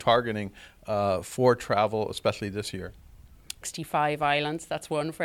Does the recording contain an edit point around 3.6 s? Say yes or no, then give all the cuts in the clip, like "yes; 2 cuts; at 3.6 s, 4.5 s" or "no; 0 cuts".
yes; 1 cut; at 3.6 s